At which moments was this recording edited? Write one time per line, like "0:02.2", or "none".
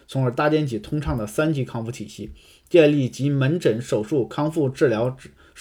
none